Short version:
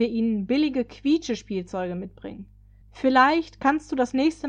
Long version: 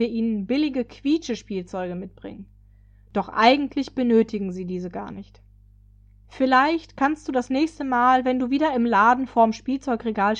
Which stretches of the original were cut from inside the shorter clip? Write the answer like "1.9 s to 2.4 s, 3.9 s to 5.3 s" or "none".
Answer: 2.8 s to 6.2 s